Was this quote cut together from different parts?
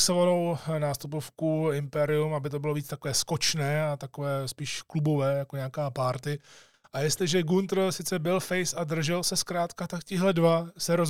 no; 0 cuts

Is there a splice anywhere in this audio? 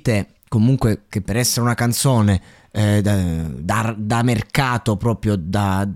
no; 0 cuts

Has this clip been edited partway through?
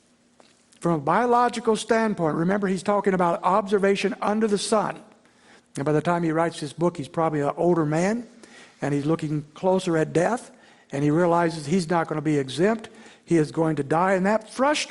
yes; 1 cut; at 5.6 s

